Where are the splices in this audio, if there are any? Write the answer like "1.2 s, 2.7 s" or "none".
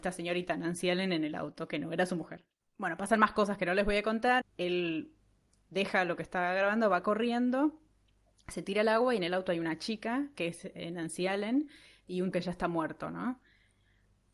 4.4 s, 12.3 s